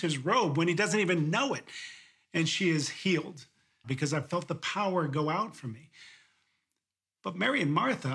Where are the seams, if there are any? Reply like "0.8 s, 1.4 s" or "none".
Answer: 3.8 s